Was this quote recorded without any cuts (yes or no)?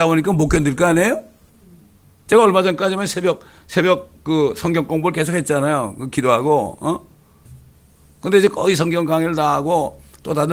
yes